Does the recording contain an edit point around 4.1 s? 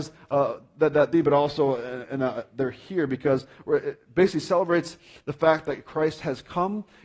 no; 1 cut; at 1.1 s

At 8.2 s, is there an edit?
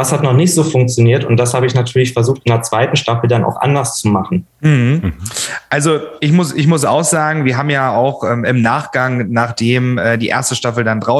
no; 1 cut; at 4.5 s

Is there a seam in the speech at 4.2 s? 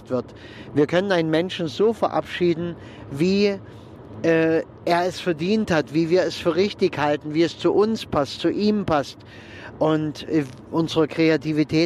no; 0 cuts

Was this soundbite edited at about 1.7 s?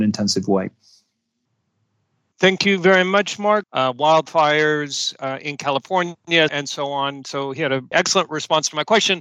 no; 3 cuts; at 3.6 s, 6.5 s, 7.9 s

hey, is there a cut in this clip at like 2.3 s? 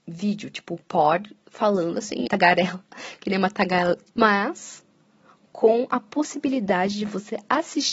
yes; 2 cuts; at 2.3 s, 4.1 s

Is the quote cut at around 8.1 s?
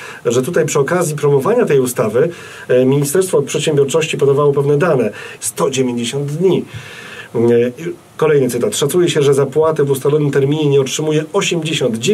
no; 1 cut; at 5.4 s

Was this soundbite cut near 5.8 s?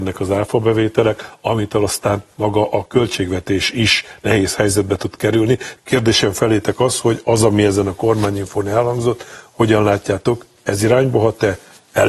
yes; 1 cut; at 5.8 s

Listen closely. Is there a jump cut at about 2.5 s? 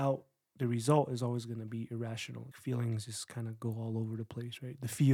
yes; 1 cut; at 2.5 s

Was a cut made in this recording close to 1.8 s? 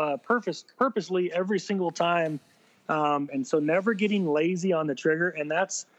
no; 1 cut; at 3.3 s

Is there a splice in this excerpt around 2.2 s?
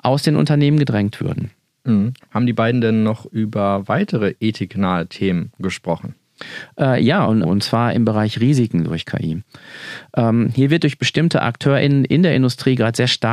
yes; 2 cuts; at 2.2 s, 7.4 s

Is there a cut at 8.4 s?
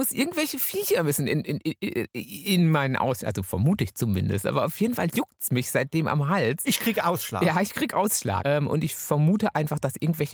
yes; 1 cut; at 8.4 s

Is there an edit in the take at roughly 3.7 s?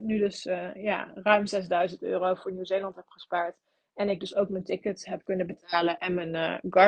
no; 0 cuts

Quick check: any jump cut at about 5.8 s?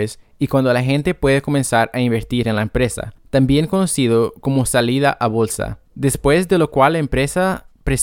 yes; 1 cut; at 5.8 s

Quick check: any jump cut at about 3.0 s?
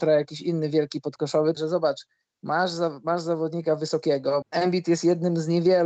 no; 2 cuts; at 1.5 s, 4.4 s

